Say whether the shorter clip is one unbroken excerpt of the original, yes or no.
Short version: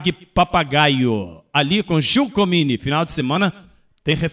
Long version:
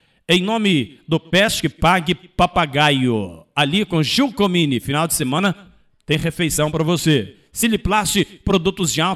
yes